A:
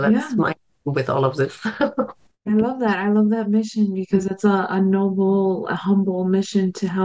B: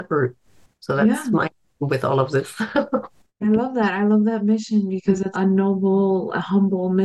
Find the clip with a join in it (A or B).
B